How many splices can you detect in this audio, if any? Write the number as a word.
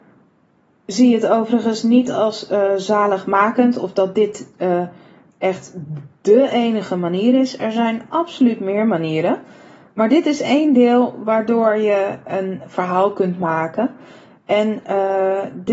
zero